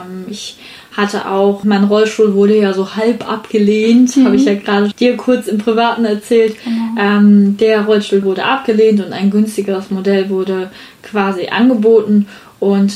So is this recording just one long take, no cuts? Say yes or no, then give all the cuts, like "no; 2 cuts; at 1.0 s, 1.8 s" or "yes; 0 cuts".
no; 3 cuts; at 1.6 s, 4.9 s, 8.2 s